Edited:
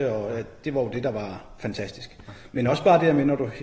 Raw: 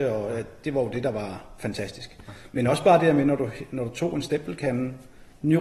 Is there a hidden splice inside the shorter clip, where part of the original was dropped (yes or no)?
no